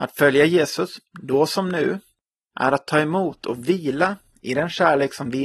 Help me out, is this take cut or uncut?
uncut